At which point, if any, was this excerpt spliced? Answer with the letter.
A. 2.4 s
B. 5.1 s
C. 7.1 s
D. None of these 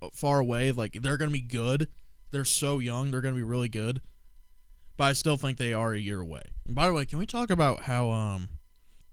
D